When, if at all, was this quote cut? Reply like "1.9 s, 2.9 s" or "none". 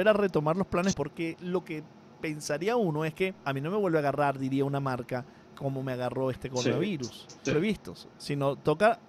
0.9 s, 3.4 s, 7.5 s

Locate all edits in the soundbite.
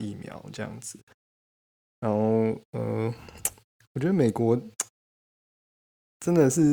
none

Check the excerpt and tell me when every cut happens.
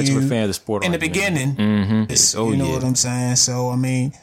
2.1 s

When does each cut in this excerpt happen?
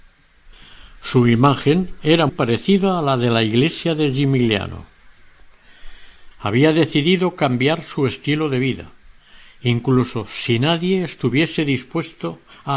2.3 s, 6.3 s

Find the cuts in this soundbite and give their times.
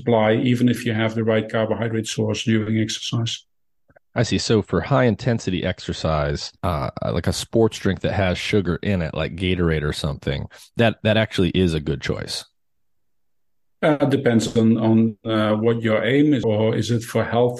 6.6 s, 16.4 s

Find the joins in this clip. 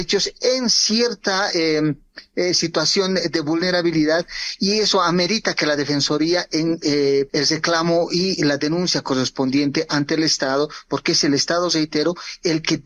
7.3 s

